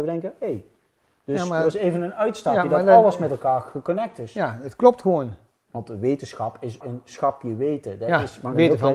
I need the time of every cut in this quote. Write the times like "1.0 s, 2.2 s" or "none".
5.6 s, 6.8 s